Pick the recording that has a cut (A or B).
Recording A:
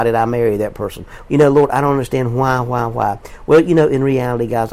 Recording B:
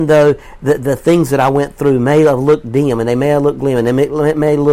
A